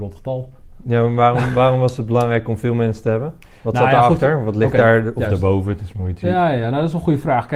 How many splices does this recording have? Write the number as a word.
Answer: zero